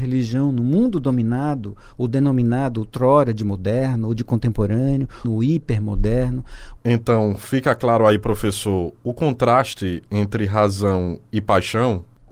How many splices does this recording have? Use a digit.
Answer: 2